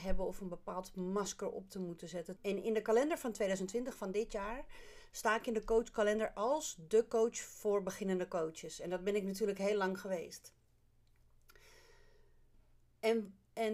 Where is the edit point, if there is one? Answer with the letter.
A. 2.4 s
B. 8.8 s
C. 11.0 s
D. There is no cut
A